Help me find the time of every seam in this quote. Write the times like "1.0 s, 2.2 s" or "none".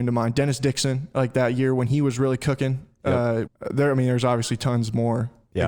3.5 s